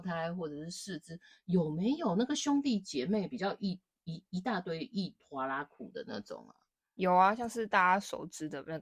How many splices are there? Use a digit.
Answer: 0